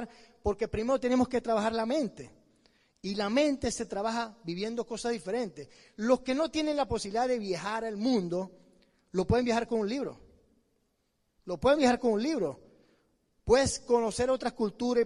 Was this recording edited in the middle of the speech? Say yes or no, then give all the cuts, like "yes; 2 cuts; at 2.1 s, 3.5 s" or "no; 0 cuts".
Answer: no; 0 cuts